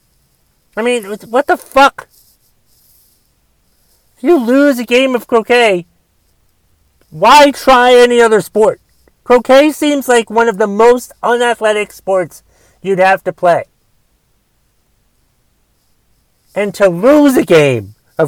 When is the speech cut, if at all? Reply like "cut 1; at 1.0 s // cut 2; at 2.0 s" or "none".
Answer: none